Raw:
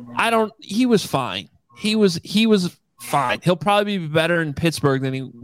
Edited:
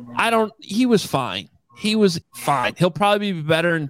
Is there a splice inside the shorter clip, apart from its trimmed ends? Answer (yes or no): yes